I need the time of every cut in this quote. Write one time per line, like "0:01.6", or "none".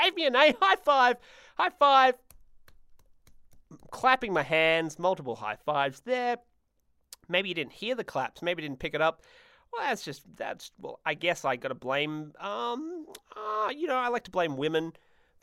none